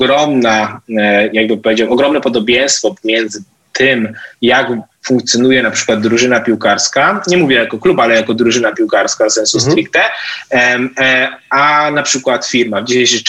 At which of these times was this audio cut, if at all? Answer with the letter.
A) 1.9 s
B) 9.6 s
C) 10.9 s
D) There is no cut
D